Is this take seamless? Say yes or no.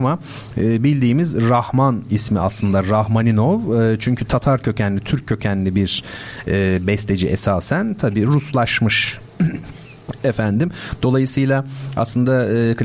yes